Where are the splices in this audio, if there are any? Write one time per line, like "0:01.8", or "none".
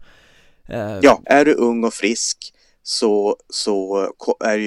0:01.2